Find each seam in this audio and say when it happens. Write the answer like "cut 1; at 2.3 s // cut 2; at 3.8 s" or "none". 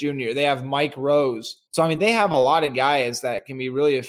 cut 1; at 1.7 s